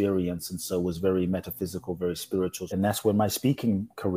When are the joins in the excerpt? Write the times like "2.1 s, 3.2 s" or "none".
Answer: 2.7 s